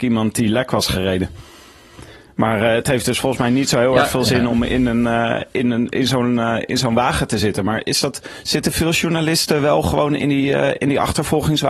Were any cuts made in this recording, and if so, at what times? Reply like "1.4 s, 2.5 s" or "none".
none